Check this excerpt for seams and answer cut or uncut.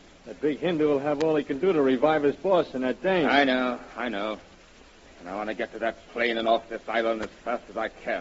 uncut